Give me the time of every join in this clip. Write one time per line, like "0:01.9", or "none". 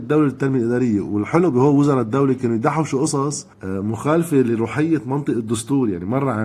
0:03.5